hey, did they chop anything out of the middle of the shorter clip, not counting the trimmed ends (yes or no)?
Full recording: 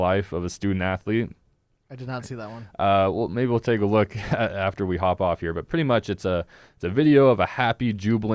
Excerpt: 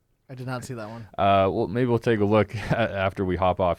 no